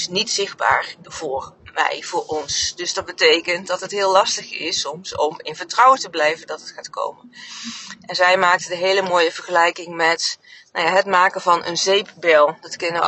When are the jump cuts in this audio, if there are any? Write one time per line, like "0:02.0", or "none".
none